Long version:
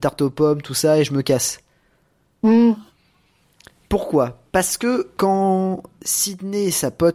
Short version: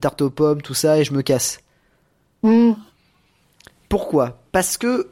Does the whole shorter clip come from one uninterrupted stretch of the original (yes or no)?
yes